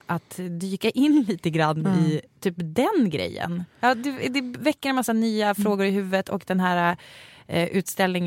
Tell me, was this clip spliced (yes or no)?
no